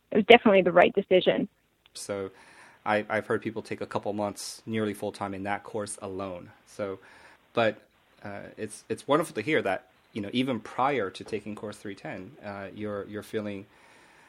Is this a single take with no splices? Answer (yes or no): no